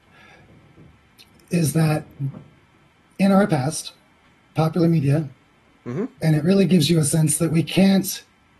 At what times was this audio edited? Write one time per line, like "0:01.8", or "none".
0:06.2

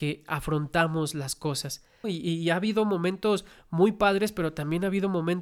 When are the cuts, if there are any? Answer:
0:02.0

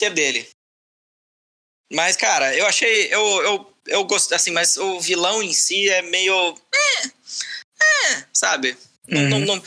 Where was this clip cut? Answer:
none

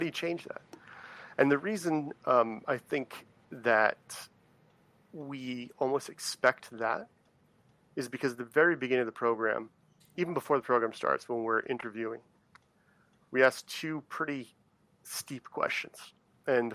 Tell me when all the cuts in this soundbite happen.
none

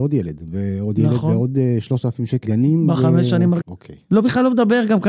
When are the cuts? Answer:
0:02.4
0:03.6

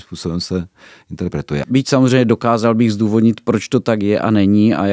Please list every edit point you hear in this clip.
0:01.6

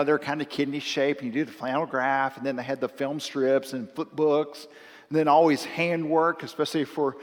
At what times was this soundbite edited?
none

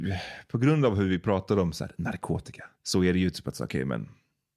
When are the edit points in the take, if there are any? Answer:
0:02.7

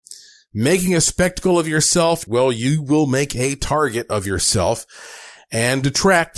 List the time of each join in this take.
0:02.3

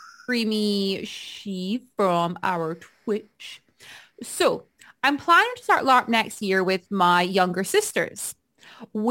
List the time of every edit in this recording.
none

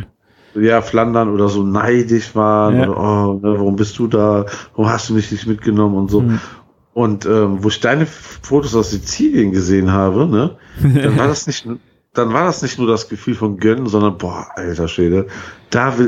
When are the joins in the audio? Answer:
none

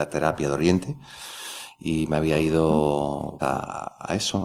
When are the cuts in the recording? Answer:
0:03.4

